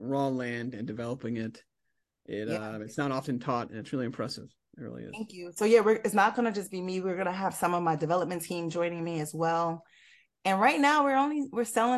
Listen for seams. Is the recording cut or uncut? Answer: uncut